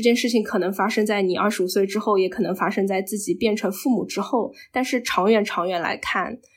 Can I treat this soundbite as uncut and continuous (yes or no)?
yes